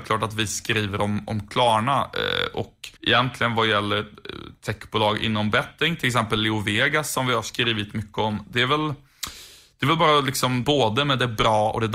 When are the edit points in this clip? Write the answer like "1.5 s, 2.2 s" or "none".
3.0 s, 10.6 s